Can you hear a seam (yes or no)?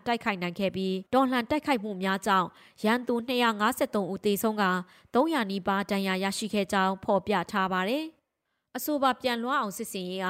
yes